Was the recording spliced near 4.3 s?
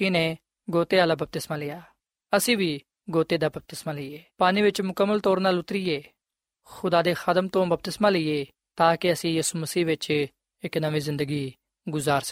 yes; 1 cut; at 4.3 s

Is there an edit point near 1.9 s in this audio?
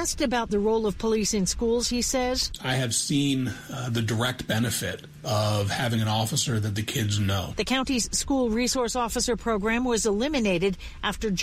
no; 0 cuts

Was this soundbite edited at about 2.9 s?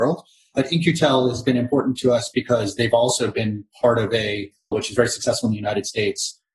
no; 1 cut; at 4.7 s

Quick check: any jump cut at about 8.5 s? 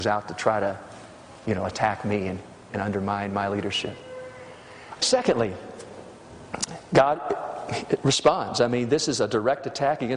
no; 1 cut; at 5.0 s

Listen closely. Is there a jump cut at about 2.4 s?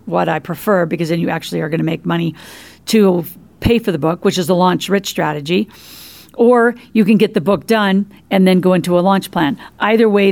no; 0 cuts

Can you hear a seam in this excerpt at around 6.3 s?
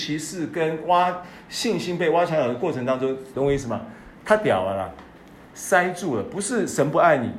no; 1 cut; at 3.3 s

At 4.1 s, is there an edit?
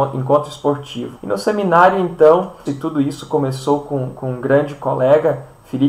no; 2 cuts; at 1.2 s, 2.7 s

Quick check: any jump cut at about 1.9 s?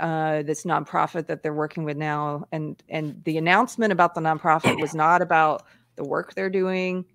no; 0 cuts

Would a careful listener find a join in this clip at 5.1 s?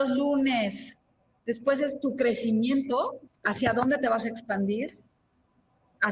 no; 2 cuts; at 1.4 s, 3.3 s

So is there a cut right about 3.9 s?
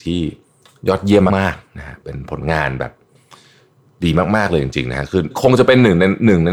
no; 1 cut; at 1.3 s

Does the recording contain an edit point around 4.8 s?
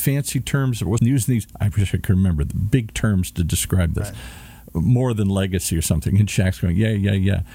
no; 1 cut; at 1.0 s

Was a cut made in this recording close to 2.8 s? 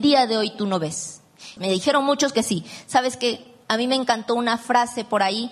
no; 1 cut; at 1.6 s

